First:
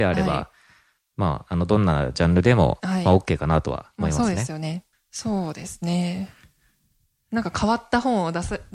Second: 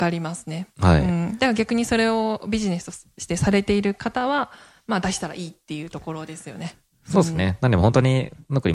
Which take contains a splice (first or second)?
first